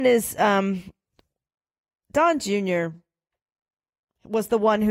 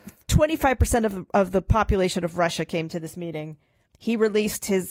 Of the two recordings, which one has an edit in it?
second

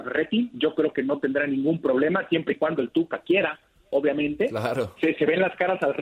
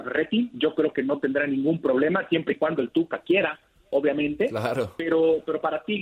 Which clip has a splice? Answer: first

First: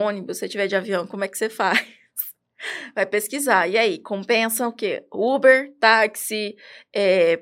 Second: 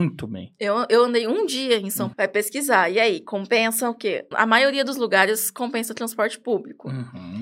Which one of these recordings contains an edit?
second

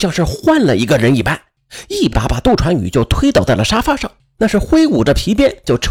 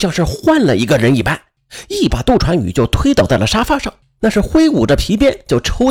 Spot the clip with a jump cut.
second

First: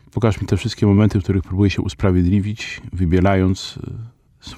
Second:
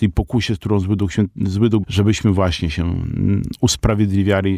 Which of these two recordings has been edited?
second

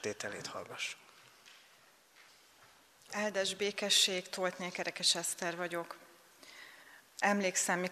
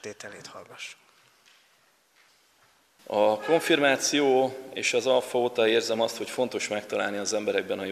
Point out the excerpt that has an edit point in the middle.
second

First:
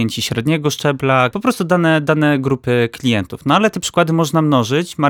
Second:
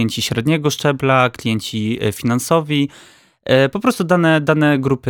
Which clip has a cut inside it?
first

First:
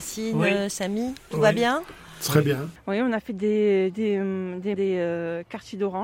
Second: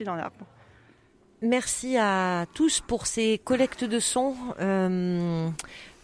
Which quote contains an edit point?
first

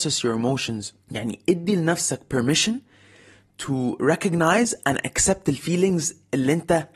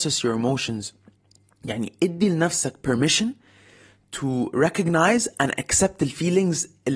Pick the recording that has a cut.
first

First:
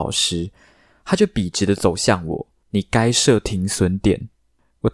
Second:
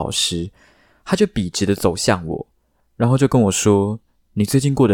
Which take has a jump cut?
first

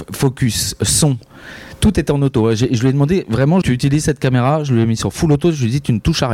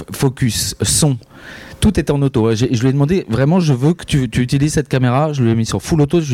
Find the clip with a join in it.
first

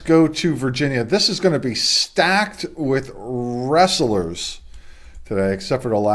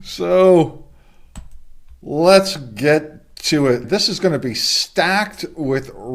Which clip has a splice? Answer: second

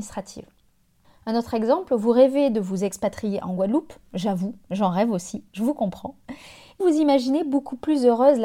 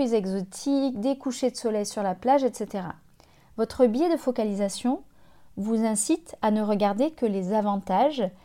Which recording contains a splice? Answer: first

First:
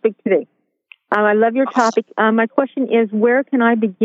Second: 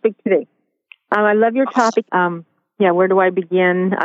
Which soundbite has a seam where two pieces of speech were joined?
second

